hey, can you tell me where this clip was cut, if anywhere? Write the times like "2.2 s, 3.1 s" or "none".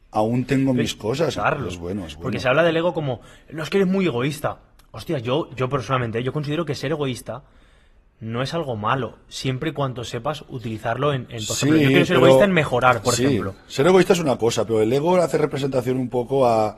1.4 s